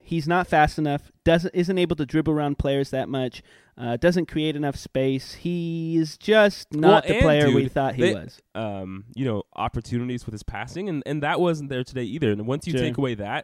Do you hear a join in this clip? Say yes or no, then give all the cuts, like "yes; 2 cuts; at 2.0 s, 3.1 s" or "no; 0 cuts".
yes; 1 cut; at 8.4 s